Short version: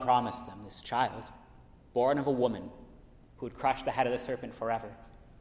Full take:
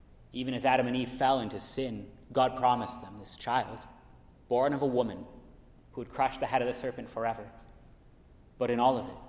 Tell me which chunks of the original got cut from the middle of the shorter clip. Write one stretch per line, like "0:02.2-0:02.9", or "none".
none